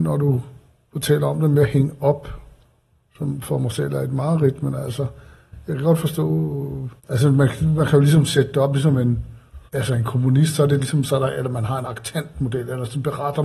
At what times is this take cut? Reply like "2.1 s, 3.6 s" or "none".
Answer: 7.0 s, 9.7 s